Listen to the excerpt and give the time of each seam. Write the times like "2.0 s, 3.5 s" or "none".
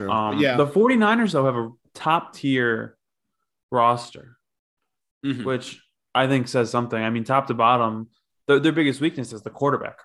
1.8 s